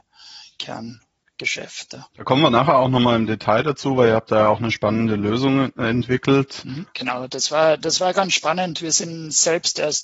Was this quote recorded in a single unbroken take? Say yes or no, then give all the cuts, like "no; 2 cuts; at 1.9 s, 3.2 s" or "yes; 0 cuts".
no; 2 cuts; at 2.1 s, 6.9 s